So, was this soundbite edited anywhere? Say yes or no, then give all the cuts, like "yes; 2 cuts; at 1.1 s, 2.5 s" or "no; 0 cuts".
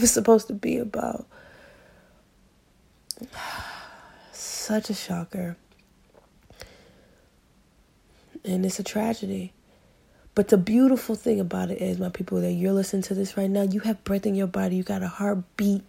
no; 0 cuts